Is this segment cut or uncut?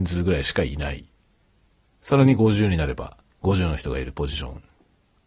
cut